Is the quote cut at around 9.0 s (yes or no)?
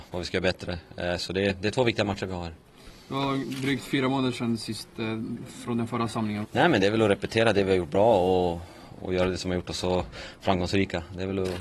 yes